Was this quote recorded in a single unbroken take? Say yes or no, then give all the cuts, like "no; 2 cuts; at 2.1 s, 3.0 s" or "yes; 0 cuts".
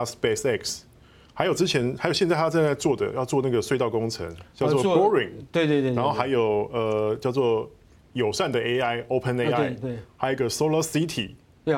yes; 0 cuts